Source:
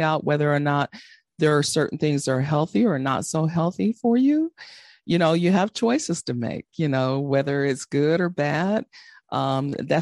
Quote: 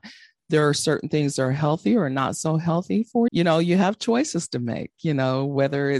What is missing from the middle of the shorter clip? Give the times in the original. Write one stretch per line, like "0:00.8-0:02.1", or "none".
0:04.2-0:05.0